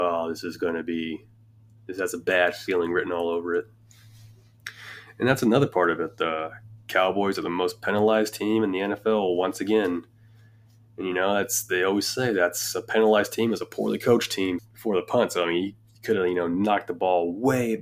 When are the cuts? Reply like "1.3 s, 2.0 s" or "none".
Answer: 14.6 s

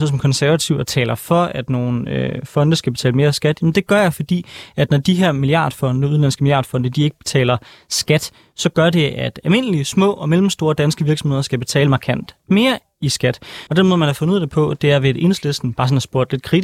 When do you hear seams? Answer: 13.7 s

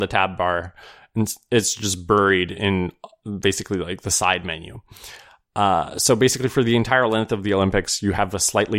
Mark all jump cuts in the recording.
none

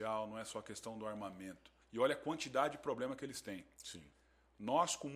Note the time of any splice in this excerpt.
1.8 s

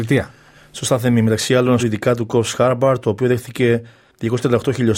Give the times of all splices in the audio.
1.8 s

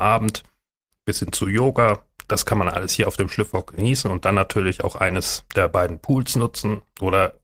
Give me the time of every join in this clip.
none

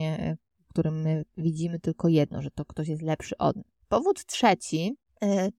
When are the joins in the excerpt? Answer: none

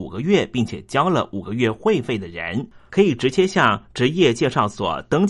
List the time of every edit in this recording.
2.9 s

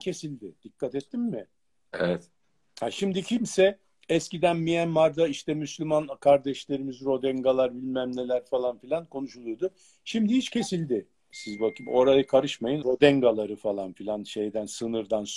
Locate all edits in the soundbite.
11.3 s, 12.8 s

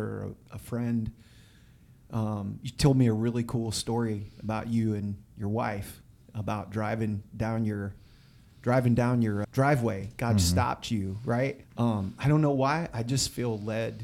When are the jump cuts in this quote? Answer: 9.4 s, 11.6 s

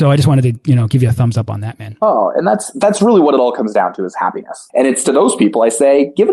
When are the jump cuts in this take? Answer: 4.7 s

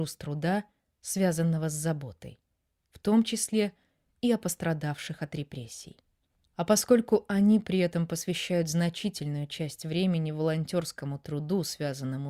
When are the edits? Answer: none

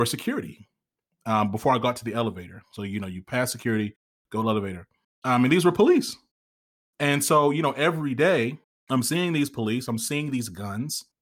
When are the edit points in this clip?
none

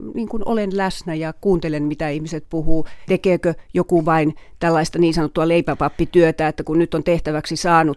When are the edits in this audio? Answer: 3.1 s

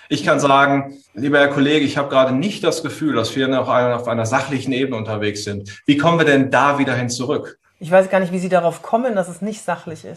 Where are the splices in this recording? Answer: 1.0 s, 7.6 s

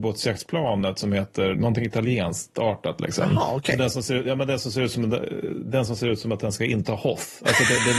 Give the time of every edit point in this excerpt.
1.5 s

